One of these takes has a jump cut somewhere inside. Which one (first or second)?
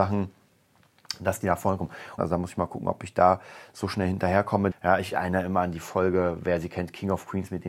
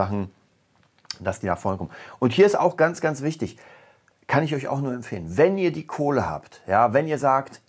first